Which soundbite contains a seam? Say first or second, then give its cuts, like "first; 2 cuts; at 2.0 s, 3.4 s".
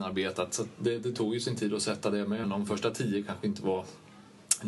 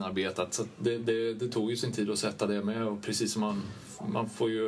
first; 2 cuts; at 1.0 s, 2.4 s